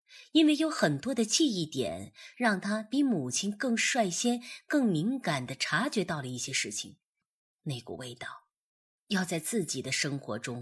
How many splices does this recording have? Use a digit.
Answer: 3